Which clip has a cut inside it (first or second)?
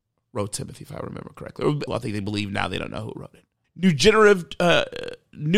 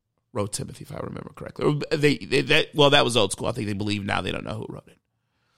first